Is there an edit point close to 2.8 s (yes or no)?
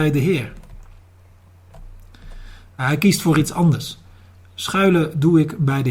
yes